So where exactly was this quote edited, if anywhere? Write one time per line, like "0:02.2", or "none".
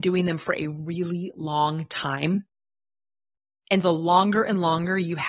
0:03.8